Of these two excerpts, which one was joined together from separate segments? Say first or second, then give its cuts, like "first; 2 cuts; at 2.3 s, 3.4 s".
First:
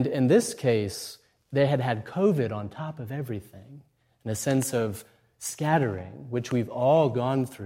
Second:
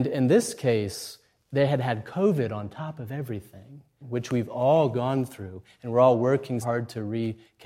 second; 2 cuts; at 4.0 s, 6.6 s